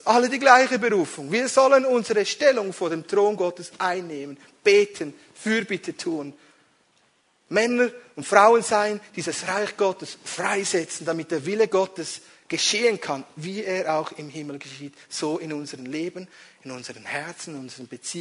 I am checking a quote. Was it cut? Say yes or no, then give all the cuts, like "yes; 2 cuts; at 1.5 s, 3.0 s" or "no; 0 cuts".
no; 0 cuts